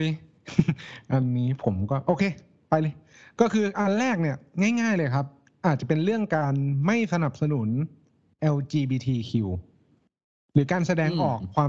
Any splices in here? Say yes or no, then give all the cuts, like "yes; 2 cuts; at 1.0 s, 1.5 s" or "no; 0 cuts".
no; 0 cuts